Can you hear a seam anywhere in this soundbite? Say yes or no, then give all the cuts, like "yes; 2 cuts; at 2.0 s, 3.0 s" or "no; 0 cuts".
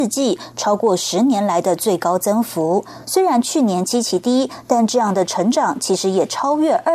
yes; 1 cut; at 3.0 s